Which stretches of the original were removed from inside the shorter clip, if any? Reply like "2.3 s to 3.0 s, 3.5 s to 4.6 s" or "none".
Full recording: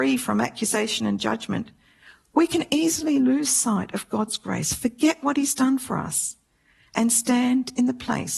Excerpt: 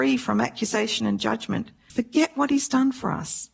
1.9 s to 4.8 s